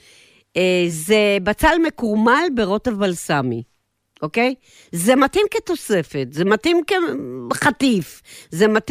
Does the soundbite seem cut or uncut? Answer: uncut